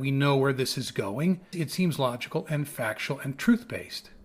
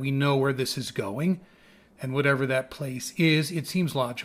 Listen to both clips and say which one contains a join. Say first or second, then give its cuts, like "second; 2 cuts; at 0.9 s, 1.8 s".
first; 1 cut; at 1.5 s